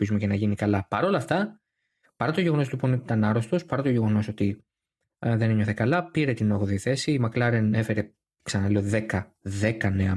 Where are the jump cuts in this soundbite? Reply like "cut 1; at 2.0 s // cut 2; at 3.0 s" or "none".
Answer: none